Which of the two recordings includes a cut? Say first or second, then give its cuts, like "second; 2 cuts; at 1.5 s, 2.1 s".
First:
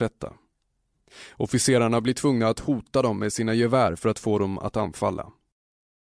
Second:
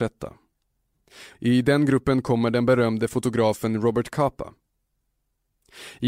second; 1 cut; at 1.3 s